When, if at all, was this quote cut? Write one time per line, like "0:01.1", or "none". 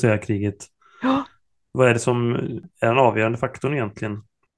none